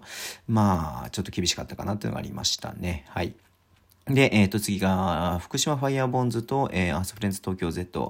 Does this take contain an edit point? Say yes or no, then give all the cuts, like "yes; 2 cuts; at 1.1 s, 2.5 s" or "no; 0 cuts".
no; 0 cuts